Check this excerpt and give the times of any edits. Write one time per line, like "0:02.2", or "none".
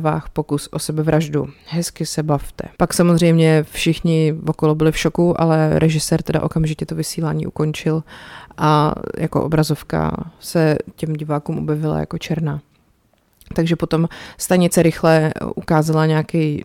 0:02.8